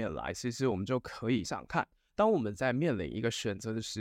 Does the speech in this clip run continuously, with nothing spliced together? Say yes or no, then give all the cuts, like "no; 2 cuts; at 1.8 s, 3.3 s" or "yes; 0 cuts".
no; 1 cut; at 1.5 s